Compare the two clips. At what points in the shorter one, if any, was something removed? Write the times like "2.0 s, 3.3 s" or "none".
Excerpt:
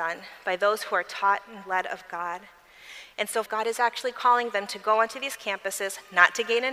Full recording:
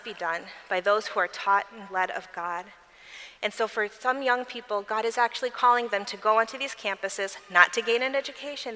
3.5 s